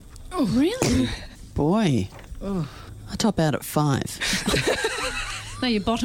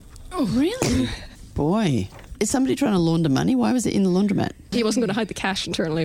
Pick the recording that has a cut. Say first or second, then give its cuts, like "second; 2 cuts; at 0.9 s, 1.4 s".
second; 2 cuts; at 2.4 s, 4.7 s